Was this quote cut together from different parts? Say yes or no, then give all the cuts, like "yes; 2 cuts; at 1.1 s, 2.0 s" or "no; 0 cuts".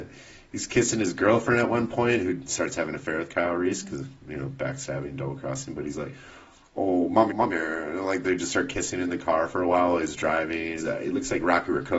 yes; 2 cuts; at 7.3 s, 10.8 s